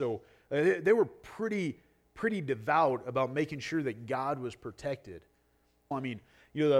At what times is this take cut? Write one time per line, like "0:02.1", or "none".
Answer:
0:05.9